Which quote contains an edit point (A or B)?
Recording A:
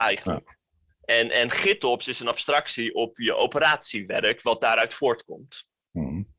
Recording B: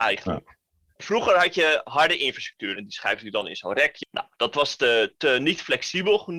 B